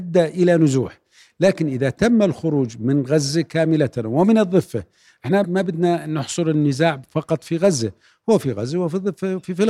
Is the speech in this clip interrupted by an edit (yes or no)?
yes